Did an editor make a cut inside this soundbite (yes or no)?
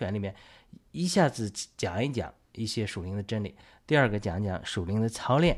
no